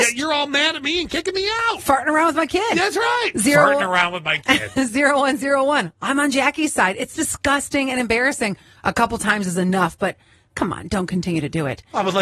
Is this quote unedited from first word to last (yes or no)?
yes